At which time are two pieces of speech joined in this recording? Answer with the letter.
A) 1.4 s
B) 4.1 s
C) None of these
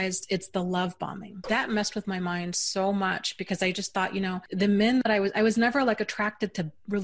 A